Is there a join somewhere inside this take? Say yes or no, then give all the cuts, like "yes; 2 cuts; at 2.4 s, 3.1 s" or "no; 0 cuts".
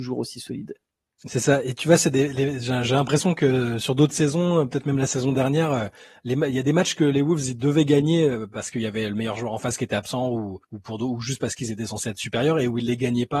yes; 1 cut; at 10.6 s